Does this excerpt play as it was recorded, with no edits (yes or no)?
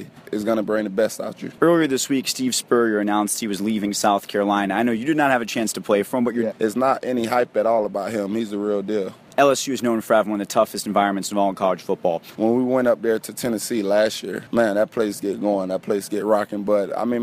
no